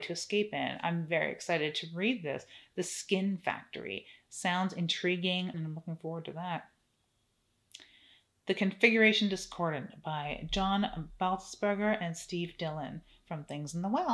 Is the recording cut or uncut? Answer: cut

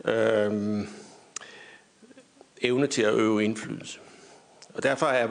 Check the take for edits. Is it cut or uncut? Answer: uncut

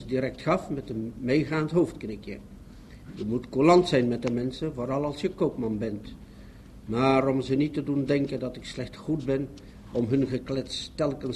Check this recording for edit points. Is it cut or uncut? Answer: uncut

